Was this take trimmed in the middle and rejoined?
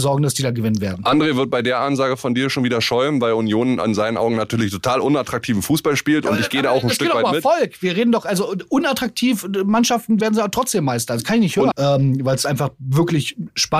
yes; 2 cuts; at 10.2 s, 11.7 s

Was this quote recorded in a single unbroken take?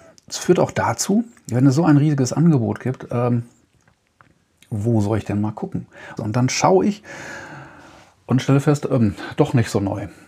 no; 1 cut; at 6.2 s

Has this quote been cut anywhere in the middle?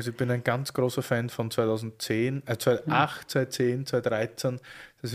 no; 0 cuts

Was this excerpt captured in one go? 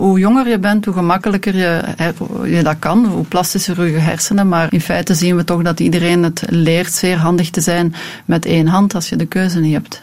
no; 1 cut; at 4.7 s

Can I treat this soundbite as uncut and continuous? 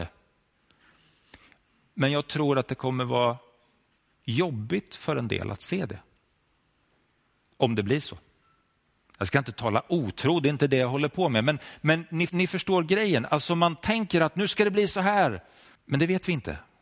no; 2 cuts; at 12.3 s, 15.8 s

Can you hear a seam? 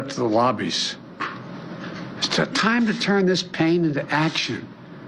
no; 0 cuts

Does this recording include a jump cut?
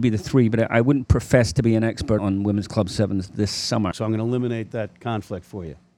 yes; 2 cuts; at 2.2 s, 3.9 s

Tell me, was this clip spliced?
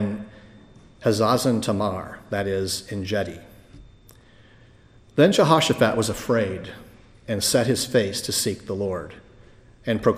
no; 0 cuts

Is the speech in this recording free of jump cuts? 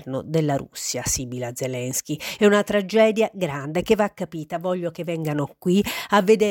no; 1 cut; at 2.4 s

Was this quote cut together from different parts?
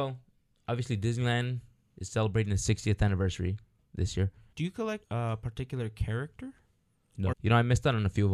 yes; 2 cuts; at 4.5 s, 7.3 s

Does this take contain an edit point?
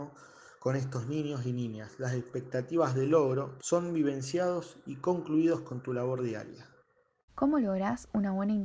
yes; 2 cuts; at 3.6 s, 7.2 s

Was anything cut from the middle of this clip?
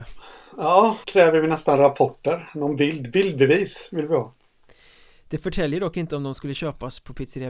yes; 1 cut; at 1.0 s

